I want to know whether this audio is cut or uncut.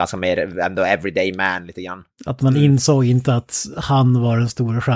cut